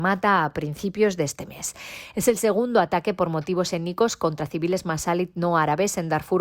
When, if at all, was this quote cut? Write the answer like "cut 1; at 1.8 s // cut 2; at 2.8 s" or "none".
none